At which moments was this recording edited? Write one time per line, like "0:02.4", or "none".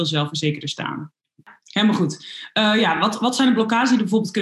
none